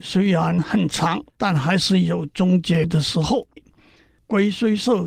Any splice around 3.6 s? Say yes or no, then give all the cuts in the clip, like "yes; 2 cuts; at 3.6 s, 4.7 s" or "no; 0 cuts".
yes; 2 cuts; at 1.3 s, 3.6 s